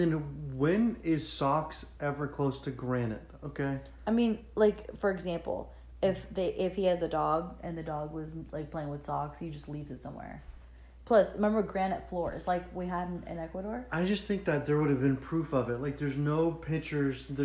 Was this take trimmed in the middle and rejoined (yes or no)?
no